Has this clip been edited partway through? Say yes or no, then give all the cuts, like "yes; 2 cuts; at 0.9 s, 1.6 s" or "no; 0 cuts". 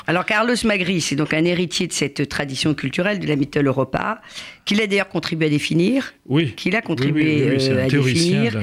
no; 0 cuts